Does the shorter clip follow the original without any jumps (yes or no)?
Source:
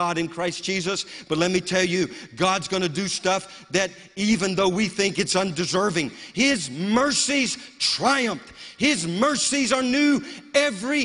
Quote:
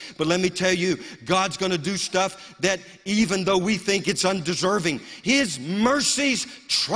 yes